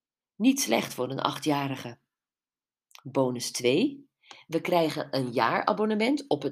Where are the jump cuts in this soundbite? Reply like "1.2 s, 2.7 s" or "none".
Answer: none